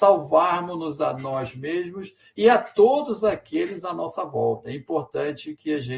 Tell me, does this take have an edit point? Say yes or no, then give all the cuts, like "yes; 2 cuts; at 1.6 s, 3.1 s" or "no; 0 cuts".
no; 0 cuts